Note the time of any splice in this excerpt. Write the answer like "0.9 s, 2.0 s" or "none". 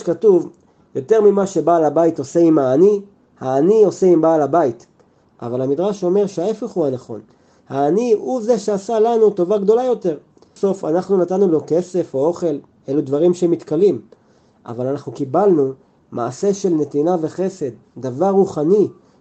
5.2 s, 10.6 s